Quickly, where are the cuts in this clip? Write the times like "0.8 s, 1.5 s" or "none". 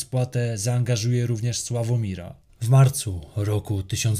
2.5 s